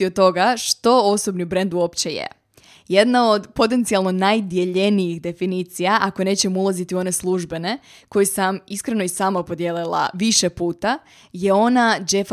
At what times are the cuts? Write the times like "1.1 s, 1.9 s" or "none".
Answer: none